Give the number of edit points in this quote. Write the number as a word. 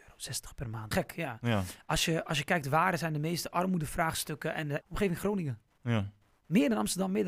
two